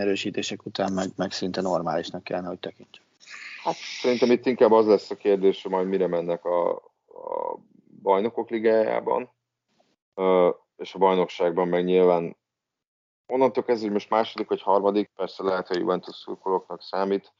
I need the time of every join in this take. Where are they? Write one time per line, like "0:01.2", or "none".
0:15.1